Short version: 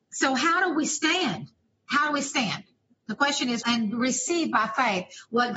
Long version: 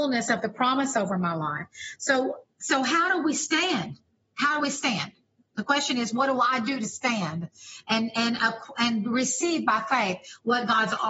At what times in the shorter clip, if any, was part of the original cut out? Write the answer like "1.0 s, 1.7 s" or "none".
3.6 s

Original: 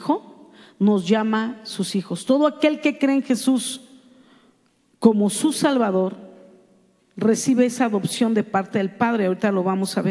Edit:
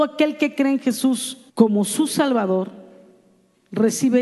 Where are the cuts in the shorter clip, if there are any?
1.5 s

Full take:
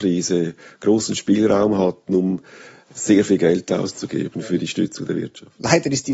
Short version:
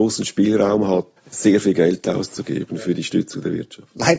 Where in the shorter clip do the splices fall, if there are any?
1.2 s

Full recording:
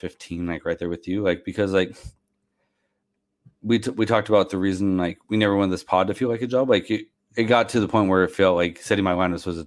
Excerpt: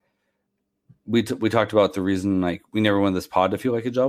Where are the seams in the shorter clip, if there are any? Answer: none

